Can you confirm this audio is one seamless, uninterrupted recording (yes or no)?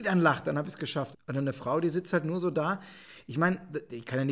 no